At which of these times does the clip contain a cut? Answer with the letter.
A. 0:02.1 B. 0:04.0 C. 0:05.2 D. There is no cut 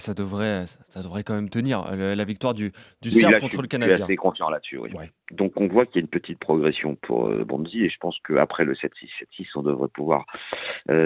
C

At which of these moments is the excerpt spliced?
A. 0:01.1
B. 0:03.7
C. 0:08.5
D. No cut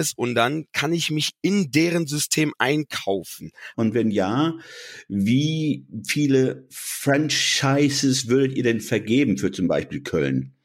B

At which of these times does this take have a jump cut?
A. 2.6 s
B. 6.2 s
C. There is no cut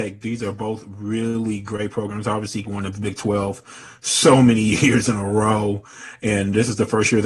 A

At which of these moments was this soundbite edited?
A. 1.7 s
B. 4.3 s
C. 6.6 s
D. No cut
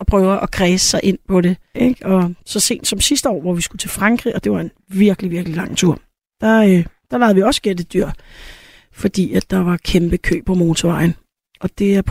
A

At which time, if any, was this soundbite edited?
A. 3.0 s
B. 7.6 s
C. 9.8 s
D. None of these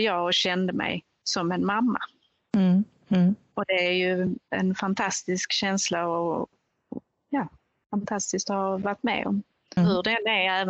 C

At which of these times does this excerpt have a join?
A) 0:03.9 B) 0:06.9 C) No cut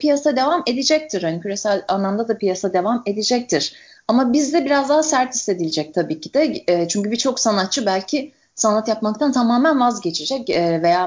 C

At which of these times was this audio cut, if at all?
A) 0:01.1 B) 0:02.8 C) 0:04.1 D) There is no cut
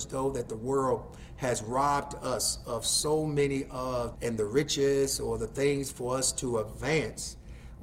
C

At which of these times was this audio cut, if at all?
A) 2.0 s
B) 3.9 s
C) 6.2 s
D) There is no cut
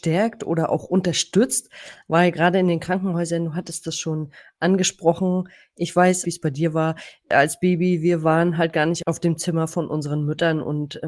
C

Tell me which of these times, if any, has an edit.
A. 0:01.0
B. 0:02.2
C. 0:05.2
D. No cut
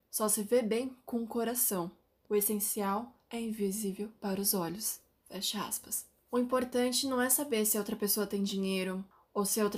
D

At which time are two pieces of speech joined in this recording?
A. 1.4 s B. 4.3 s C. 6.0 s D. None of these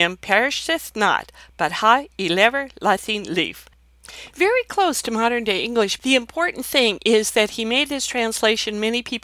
C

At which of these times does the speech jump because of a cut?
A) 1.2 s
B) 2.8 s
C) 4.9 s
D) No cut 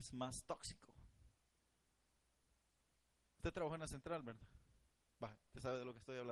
D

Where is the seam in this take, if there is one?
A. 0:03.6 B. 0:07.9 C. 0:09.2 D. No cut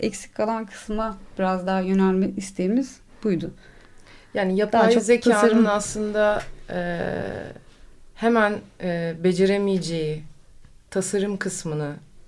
D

